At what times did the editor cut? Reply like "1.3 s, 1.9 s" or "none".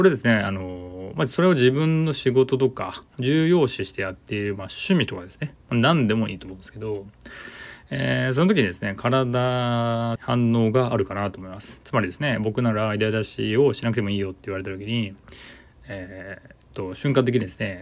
10.2 s